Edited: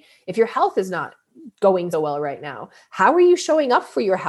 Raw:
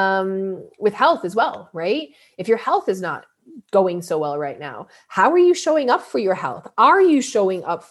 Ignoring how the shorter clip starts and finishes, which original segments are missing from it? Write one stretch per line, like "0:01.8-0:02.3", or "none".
0:04.0-0:04.1